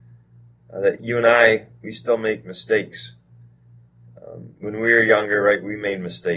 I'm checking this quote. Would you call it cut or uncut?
uncut